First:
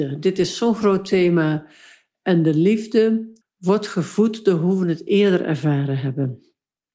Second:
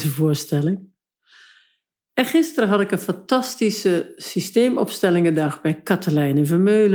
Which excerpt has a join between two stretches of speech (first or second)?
first